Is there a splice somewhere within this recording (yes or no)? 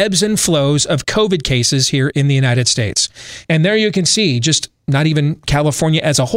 yes